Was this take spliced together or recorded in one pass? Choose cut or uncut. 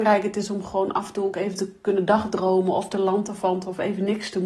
uncut